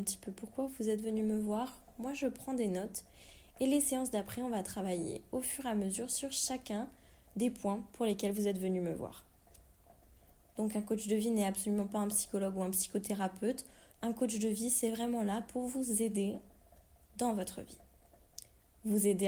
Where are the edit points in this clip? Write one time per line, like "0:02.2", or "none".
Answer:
0:13.9